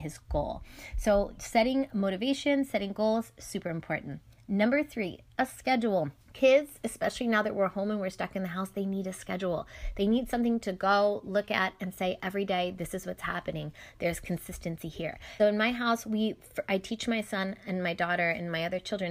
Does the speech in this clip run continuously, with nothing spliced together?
no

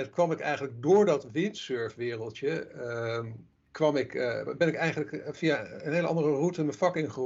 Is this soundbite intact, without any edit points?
yes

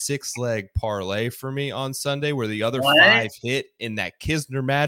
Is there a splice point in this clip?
no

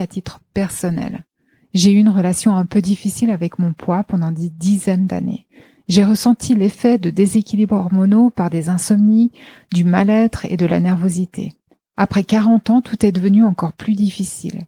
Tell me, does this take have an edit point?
no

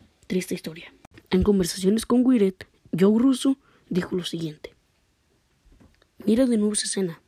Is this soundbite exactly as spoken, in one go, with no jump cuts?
no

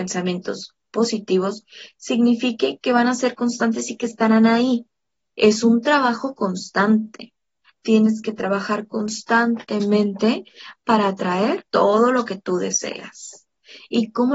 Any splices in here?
yes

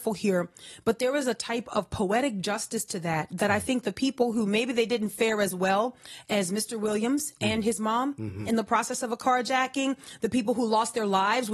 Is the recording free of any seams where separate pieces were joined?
no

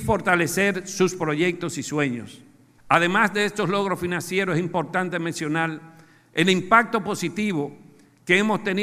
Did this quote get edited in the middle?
yes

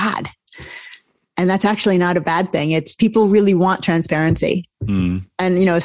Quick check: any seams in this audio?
no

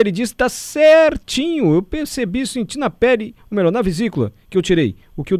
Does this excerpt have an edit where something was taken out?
no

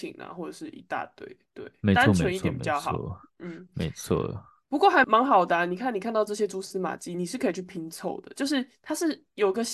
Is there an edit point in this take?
yes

